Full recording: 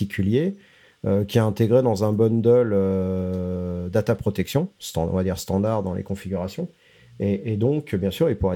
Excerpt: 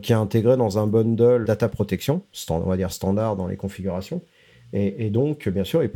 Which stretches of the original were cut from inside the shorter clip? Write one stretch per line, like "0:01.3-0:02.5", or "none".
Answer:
0:02.7-0:03.9